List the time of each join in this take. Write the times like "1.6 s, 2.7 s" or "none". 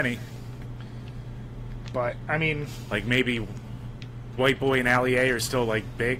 4.4 s